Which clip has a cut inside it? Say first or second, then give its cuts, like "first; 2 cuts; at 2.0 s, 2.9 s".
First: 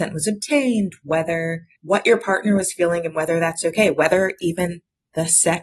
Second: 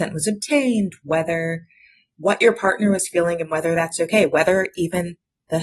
first; 1 cut; at 1.8 s